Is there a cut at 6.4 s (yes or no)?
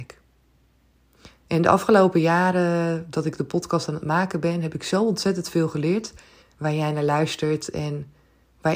yes